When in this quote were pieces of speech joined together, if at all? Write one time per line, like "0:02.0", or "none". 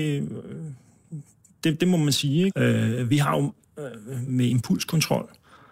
0:02.5
0:04.3